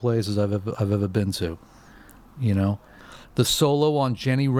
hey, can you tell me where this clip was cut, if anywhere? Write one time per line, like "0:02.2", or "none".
0:03.2